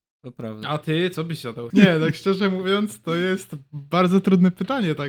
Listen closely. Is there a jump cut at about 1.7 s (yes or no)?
yes